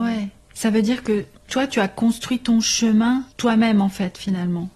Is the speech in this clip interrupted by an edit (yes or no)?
yes